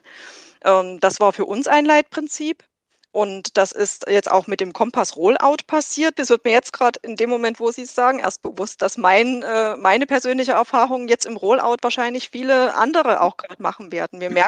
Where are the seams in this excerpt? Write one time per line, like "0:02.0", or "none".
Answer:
0:06.2

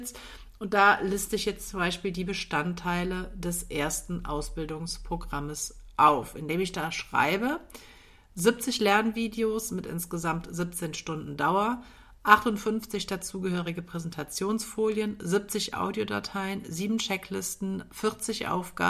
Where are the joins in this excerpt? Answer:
none

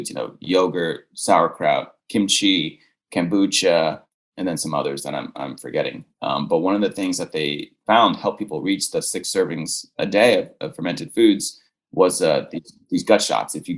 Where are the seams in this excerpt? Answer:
none

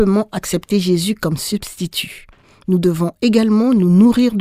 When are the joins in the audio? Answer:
none

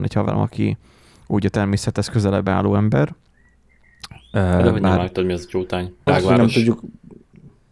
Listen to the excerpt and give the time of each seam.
0:06.1

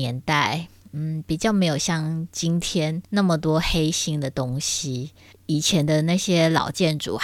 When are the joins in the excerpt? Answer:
none

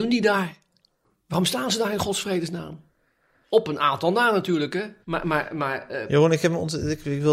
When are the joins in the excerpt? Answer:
0:05.0

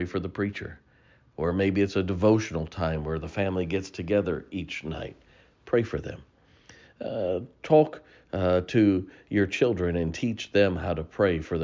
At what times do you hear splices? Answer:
none

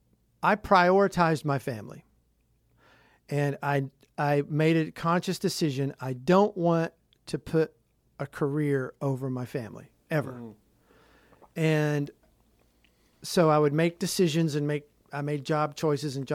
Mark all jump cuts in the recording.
none

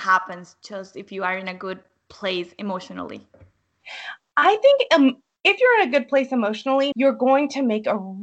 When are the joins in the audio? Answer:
0:06.9

